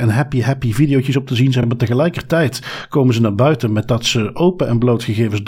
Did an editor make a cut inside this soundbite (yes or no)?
no